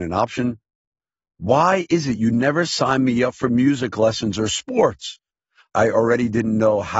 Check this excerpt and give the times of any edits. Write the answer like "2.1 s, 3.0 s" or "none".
5.6 s

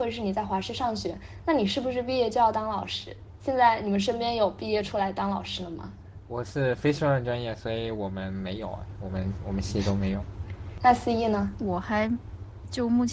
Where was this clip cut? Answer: none

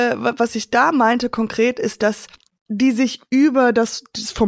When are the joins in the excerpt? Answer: none

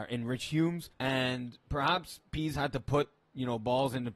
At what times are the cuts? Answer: 0.9 s

